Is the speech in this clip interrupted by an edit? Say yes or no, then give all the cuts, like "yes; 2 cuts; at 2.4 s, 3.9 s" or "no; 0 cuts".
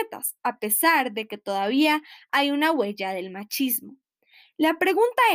no; 0 cuts